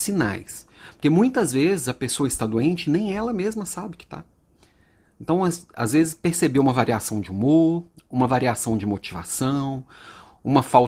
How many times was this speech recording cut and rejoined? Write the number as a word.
zero